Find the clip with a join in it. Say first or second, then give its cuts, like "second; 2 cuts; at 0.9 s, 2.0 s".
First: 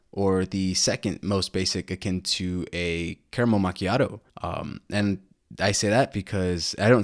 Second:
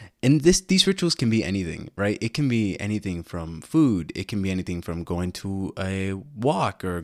first; 1 cut; at 4.3 s